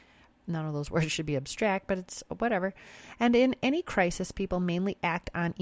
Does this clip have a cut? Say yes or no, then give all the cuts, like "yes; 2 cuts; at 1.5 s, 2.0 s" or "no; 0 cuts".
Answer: no; 0 cuts